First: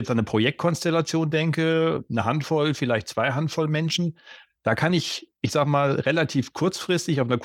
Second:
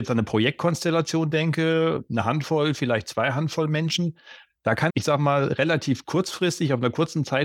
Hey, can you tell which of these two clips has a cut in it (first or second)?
second